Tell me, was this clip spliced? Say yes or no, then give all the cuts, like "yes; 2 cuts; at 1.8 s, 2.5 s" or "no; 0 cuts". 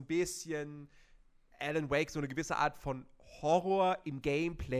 no; 0 cuts